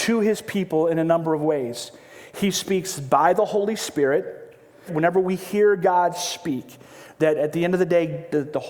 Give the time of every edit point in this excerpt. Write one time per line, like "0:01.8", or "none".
0:04.9